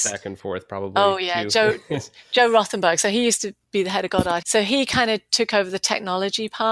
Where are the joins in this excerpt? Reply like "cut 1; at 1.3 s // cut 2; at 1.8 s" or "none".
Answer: cut 1; at 4.4 s